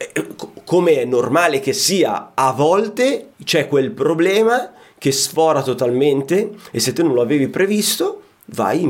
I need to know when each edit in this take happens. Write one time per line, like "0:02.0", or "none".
0:03.3